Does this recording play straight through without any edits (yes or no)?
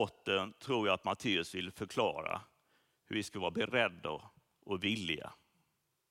yes